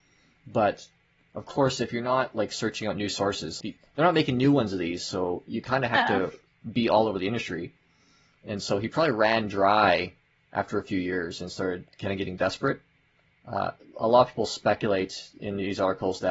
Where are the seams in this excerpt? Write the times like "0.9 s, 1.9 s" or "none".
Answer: 3.6 s

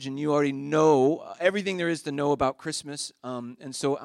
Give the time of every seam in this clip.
none

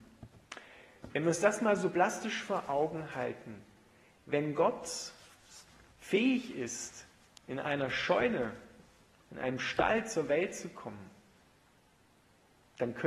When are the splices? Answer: 1.1 s

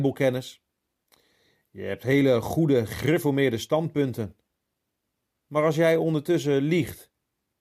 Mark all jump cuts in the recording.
none

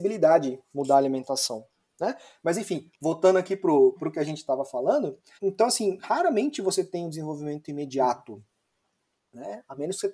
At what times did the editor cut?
4.0 s, 5.4 s

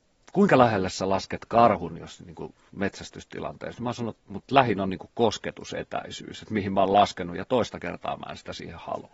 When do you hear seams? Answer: 4.2 s

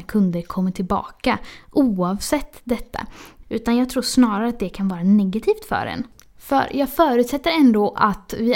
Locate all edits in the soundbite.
3.4 s

